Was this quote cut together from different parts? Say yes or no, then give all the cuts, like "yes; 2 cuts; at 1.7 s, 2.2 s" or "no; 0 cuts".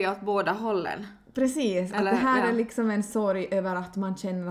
no; 0 cuts